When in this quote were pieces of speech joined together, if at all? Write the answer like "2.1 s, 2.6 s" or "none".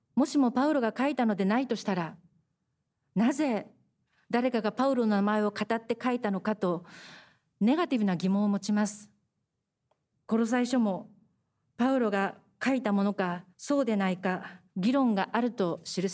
10.1 s, 13.5 s, 14.7 s